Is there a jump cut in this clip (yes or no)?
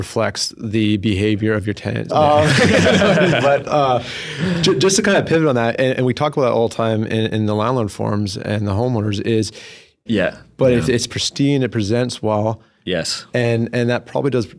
yes